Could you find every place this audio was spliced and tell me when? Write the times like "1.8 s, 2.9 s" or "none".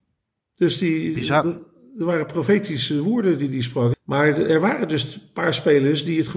3.9 s